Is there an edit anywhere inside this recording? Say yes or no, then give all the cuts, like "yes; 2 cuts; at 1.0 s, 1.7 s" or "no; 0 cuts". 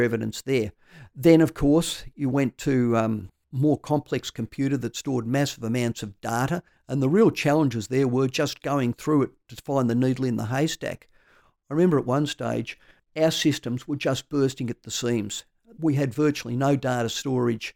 no; 0 cuts